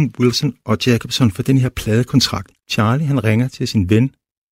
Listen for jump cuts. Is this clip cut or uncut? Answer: cut